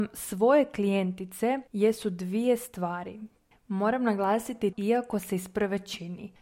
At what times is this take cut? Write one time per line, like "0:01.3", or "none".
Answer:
0:03.5
0:04.7